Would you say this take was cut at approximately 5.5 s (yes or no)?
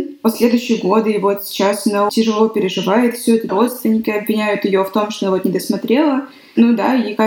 no